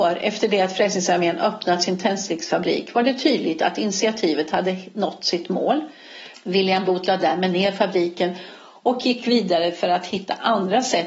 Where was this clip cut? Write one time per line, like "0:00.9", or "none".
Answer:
0:06.3